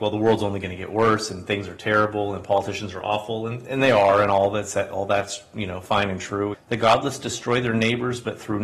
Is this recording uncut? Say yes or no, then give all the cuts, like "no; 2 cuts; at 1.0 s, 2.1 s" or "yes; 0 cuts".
no; 1 cut; at 6.5 s